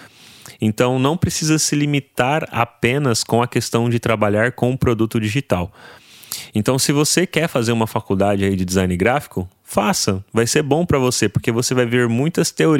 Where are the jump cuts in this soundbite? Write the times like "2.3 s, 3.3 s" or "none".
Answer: none